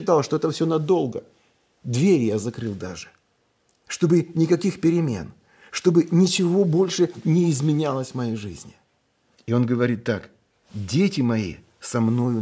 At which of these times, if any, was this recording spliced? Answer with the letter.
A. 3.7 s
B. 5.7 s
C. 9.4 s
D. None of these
C